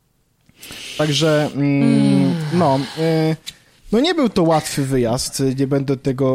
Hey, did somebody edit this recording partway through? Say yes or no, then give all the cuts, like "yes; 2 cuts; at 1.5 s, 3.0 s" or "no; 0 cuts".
no; 0 cuts